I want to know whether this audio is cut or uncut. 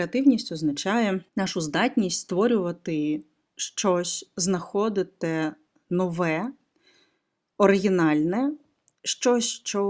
cut